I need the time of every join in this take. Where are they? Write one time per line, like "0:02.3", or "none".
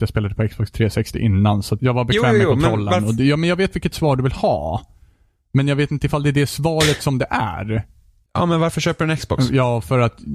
0:01.8
0:08.3